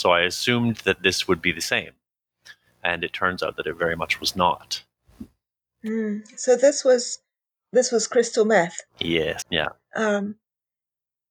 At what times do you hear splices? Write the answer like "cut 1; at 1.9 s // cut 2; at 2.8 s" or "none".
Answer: cut 1; at 9.4 s